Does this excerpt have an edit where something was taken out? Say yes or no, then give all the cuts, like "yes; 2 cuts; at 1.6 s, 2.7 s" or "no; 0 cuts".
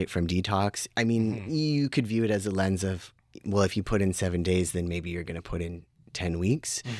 no; 0 cuts